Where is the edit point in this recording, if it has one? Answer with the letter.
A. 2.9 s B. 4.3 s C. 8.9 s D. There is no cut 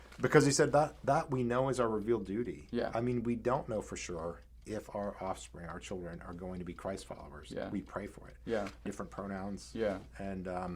C